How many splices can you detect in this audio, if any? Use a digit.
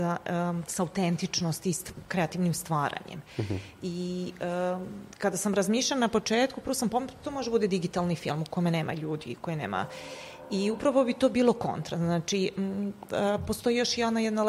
1